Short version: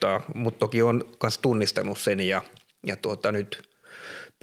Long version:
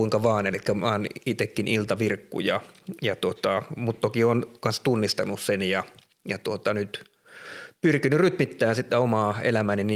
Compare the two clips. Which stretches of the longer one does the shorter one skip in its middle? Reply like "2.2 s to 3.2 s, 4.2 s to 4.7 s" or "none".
none